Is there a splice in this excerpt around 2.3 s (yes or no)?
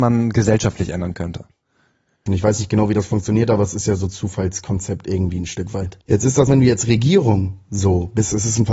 yes